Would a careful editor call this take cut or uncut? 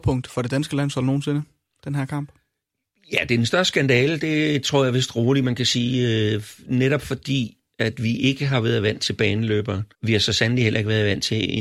cut